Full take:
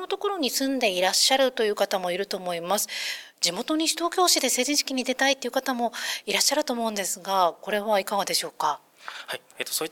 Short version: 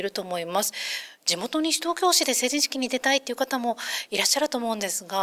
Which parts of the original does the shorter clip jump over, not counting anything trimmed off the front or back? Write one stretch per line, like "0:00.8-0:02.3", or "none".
none

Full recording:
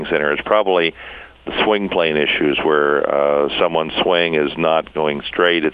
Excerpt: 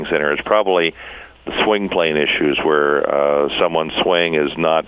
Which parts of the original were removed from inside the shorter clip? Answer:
none

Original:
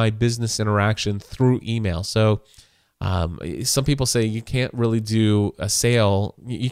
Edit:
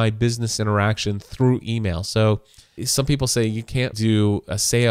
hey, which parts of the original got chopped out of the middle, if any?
0:02.8-0:03.6
0:04.7-0:05.0

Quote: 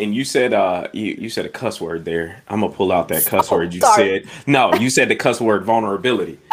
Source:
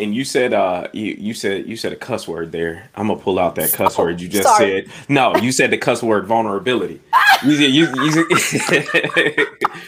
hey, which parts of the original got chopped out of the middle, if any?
0:01.2-0:01.6
0:04.3-0:04.4

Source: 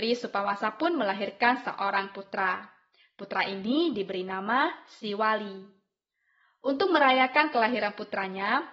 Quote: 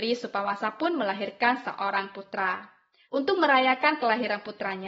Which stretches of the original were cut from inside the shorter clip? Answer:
0:03.1-0:06.6

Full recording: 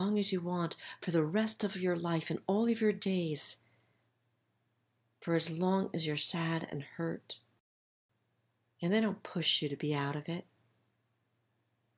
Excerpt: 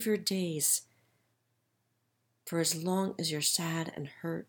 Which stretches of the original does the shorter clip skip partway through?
none

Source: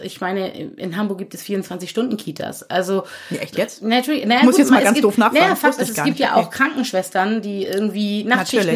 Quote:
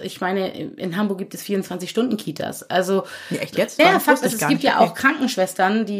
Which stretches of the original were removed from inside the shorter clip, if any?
0:03.8-0:05.4

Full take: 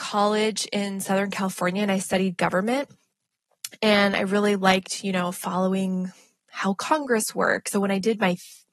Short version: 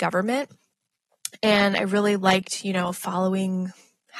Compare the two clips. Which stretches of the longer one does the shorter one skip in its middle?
none

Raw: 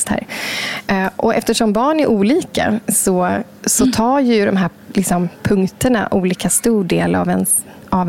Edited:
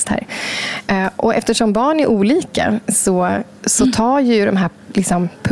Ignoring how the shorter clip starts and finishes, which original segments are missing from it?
none

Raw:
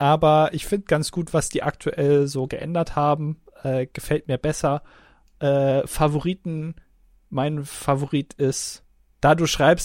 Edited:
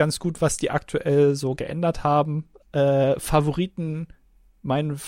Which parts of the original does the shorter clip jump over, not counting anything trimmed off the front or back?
0:03.5-0:05.3

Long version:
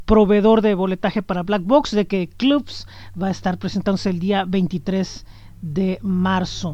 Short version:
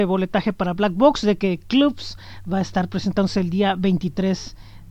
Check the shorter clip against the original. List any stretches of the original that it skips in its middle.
none

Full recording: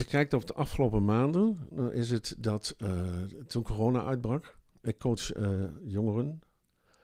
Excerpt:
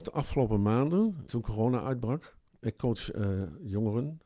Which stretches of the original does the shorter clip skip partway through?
0:01.7-0:03.5

